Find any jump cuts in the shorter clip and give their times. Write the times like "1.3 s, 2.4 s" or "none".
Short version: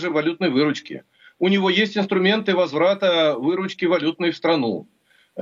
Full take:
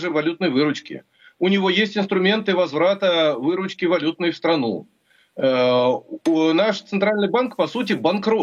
none